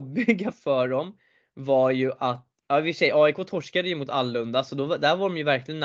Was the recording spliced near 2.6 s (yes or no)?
yes